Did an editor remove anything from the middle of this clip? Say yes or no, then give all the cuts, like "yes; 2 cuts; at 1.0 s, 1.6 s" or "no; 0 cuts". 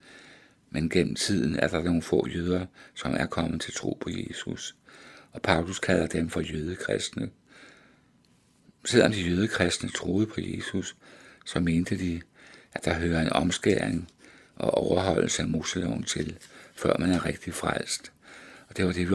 no; 0 cuts